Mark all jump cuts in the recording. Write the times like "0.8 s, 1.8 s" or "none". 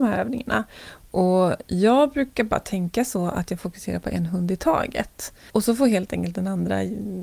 none